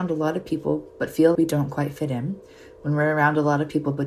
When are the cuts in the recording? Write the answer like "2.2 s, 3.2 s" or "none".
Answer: 1.4 s